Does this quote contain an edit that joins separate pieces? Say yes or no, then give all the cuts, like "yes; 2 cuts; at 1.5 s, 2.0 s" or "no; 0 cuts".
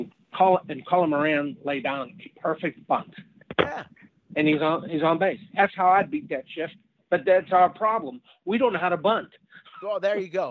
no; 0 cuts